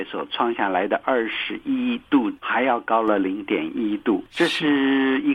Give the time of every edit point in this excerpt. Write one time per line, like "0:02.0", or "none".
none